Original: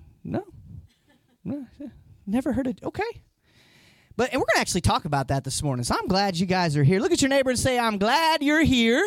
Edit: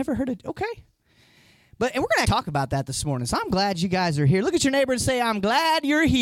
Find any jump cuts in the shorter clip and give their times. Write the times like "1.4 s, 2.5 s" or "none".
2.2 s